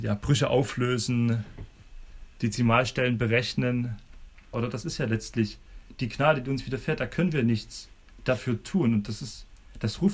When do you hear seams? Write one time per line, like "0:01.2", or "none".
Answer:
0:04.5